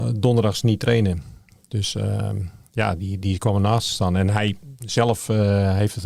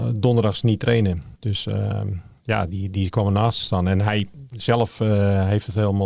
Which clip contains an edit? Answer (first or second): second